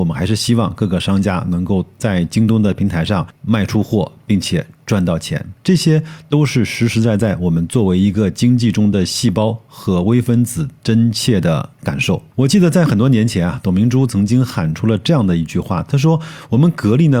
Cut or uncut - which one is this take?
uncut